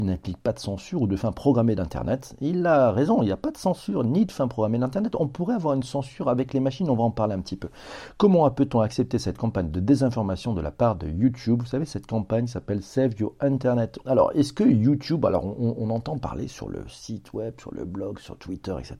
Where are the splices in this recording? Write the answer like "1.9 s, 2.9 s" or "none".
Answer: 14.0 s